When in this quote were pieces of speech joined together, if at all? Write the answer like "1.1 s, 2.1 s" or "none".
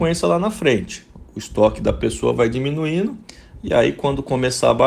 none